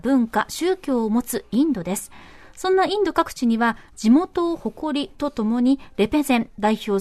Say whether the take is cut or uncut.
uncut